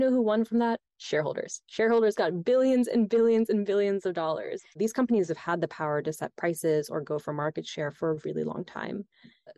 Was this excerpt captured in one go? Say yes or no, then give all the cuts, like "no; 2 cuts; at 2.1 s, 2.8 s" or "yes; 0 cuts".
no; 1 cut; at 4.7 s